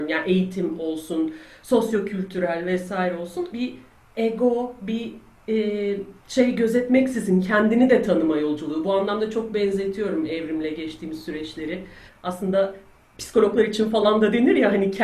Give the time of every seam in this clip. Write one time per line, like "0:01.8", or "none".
0:03.5
0:06.2
0:12.1

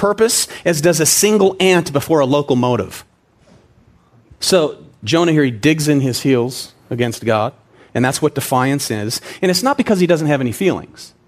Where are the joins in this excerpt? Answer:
0:04.4
0:09.4

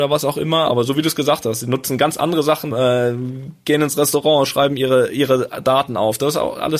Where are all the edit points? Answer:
0:02.7

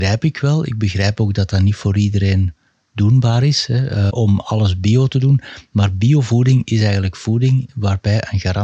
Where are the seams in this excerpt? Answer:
0:04.1

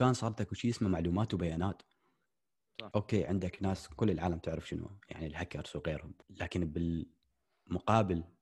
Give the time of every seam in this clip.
0:02.9
0:06.2

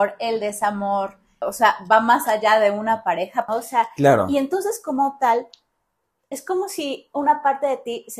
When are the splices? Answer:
0:01.4
0:03.5

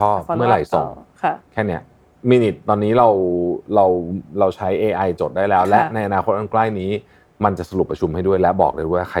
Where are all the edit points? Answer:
none

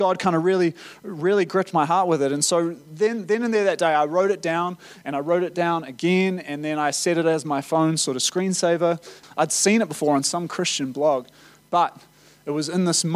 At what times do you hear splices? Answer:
0:09.2

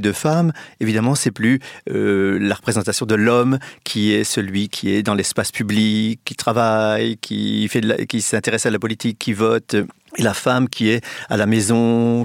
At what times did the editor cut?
0:06.2

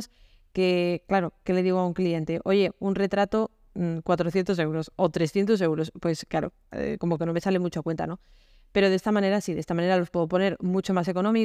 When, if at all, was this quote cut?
0:06.7

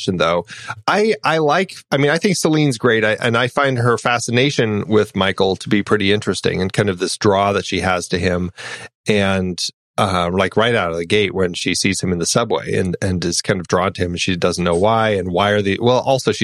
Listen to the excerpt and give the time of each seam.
none

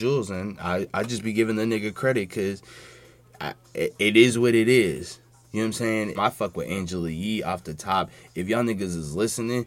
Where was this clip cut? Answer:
0:06.2

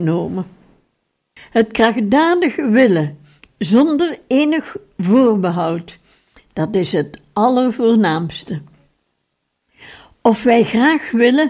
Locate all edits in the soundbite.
0:01.4

